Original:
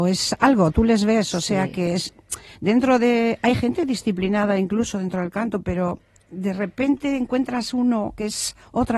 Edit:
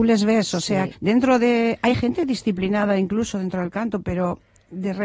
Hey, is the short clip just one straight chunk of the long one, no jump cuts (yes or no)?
no